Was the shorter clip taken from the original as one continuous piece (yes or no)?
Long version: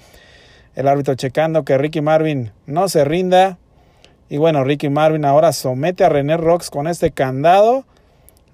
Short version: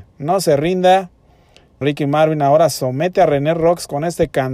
no